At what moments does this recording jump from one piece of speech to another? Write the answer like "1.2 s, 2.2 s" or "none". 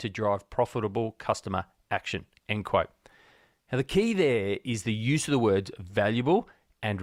none